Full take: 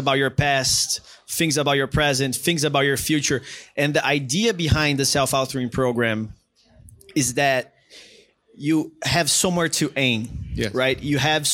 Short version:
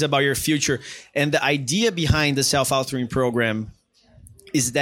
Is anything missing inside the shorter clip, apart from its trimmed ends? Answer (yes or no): no